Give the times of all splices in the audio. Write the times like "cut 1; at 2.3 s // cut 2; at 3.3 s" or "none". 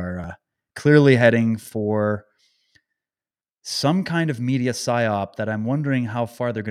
none